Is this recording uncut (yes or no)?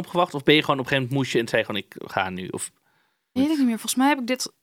no